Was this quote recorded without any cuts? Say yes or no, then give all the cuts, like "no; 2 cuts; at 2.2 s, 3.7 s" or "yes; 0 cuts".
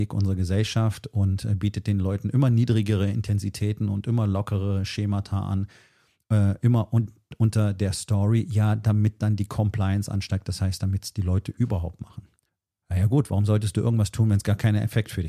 yes; 0 cuts